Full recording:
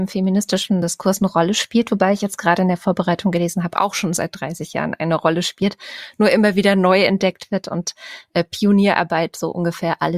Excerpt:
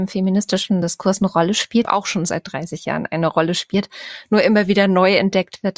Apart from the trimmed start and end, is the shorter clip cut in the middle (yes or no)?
yes